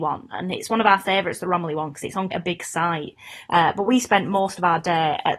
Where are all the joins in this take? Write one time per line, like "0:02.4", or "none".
0:02.3
0:03.5